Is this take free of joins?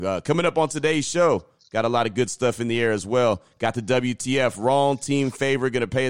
yes; 0 cuts

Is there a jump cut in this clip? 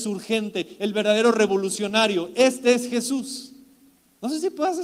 no; 0 cuts

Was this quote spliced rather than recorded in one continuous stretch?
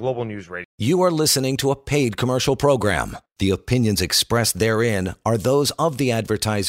yes; 1 cut; at 3.3 s

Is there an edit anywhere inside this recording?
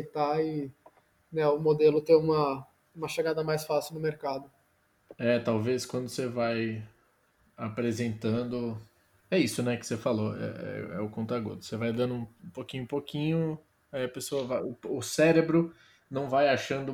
no; 0 cuts

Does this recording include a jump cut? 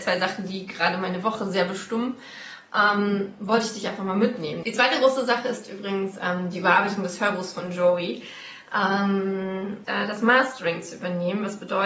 yes; 2 cuts; at 4.6 s, 9.8 s

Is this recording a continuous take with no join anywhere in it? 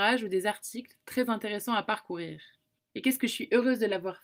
no; 1 cut; at 2.8 s

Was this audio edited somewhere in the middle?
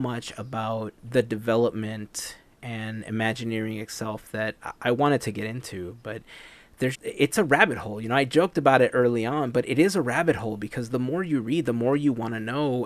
yes; 2 cuts; at 1.0 s, 6.9 s

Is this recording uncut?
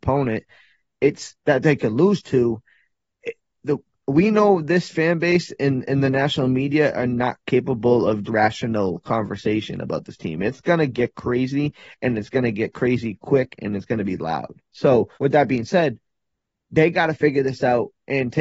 no; 2 cuts; at 8.3 s, 15.1 s

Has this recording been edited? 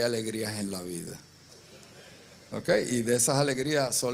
no; 0 cuts

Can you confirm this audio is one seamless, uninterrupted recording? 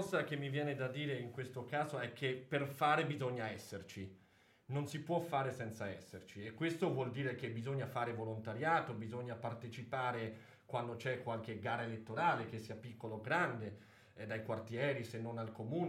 yes; 0 cuts

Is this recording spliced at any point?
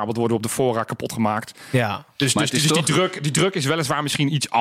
no; 0 cuts

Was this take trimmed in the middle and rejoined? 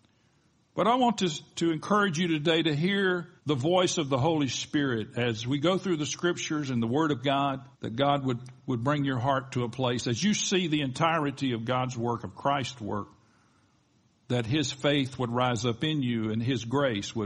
yes; 2 cuts; at 3.4 s, 7.7 s

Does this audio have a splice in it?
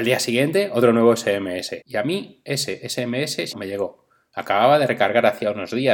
yes; 2 cuts; at 1.8 s, 3.5 s

